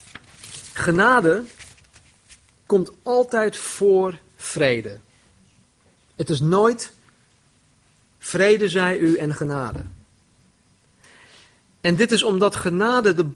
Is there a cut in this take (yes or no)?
no